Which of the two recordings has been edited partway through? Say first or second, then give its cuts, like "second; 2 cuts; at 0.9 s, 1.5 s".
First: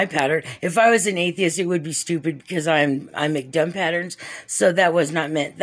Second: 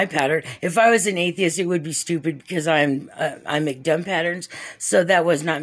first; 1 cut; at 3.1 s